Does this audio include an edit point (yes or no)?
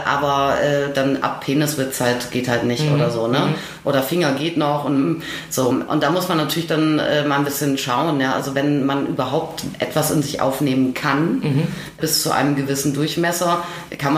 no